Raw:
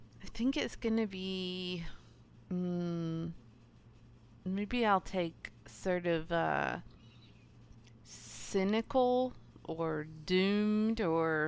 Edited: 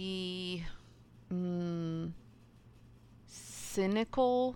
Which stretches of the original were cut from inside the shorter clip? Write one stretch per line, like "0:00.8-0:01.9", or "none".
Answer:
0:04.4-0:08.0